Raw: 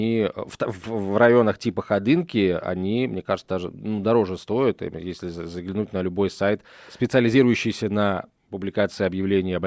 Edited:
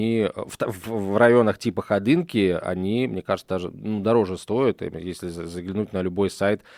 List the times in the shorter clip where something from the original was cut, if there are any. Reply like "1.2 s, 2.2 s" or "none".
none